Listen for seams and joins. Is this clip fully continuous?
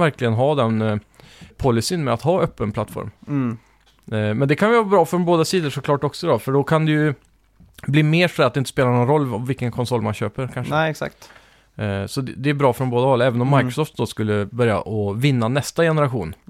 no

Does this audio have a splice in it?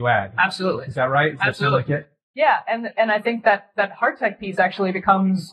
no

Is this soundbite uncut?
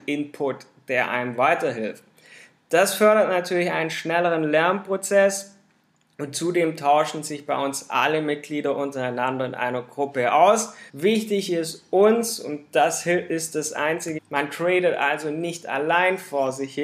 no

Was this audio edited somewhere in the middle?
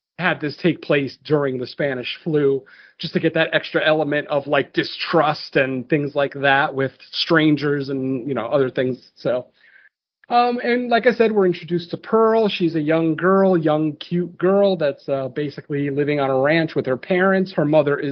no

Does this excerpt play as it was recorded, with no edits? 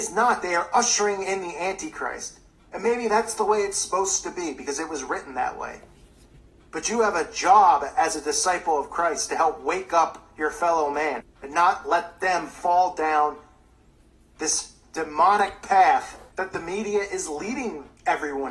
no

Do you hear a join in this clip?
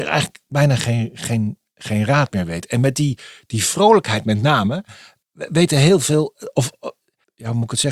no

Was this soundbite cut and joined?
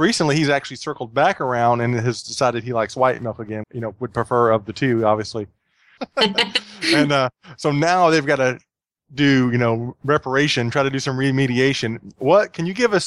yes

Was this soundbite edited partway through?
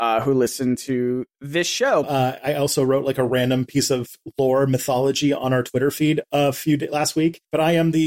yes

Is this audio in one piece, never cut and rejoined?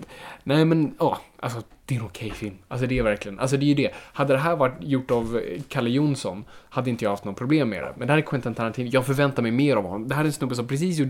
yes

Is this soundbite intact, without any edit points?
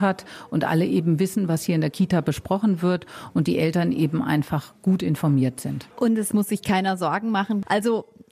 no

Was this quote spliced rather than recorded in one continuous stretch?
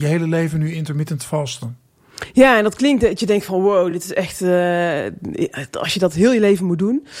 no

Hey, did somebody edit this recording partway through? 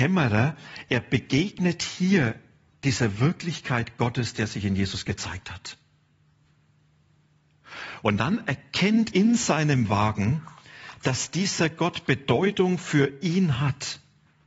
yes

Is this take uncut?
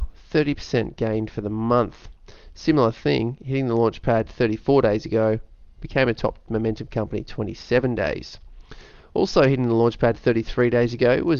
yes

